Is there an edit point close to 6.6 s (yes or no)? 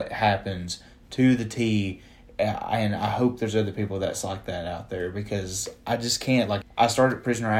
yes